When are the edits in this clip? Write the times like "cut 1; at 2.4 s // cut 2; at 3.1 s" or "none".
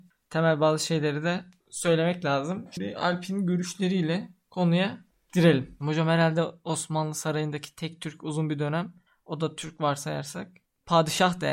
cut 1; at 5.8 s

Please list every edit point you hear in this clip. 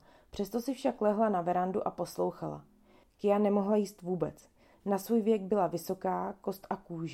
cut 1; at 3.0 s // cut 2; at 4.7 s

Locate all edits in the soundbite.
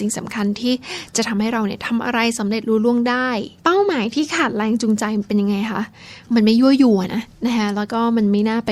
cut 1; at 3.6 s // cut 2; at 7.1 s

